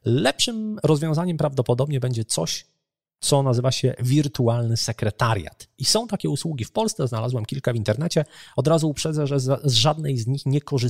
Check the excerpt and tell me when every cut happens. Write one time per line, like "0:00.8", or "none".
none